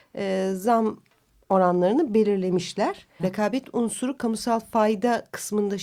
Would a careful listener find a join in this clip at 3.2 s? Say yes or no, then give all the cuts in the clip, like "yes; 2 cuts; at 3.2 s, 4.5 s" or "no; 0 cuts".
yes; 1 cut; at 3.2 s